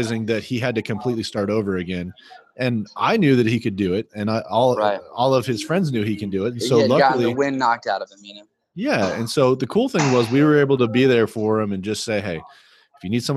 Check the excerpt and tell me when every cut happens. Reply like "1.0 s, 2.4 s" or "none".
none